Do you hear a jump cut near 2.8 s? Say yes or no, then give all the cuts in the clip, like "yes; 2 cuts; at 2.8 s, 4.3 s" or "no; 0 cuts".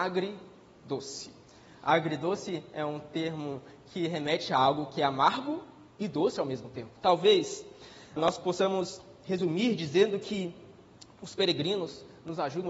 no; 2 cuts; at 7.0 s, 8.2 s